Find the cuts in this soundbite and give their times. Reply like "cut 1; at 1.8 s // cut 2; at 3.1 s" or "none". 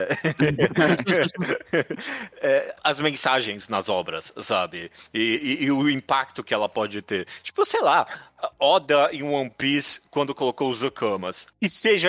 none